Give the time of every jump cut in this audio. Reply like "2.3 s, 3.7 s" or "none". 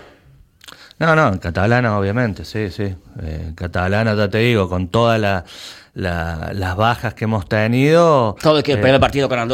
none